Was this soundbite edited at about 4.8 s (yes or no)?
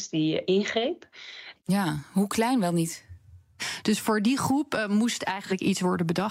no